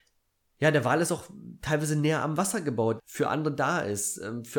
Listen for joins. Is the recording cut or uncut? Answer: cut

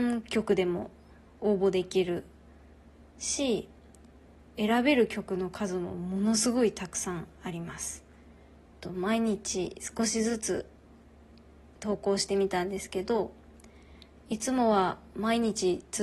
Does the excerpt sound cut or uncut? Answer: cut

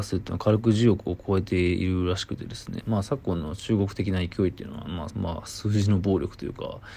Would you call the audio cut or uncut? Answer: cut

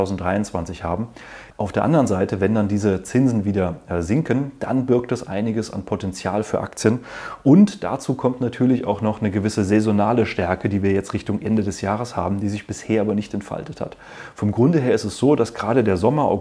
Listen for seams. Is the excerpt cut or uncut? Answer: cut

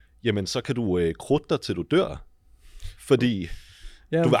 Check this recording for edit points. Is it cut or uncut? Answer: uncut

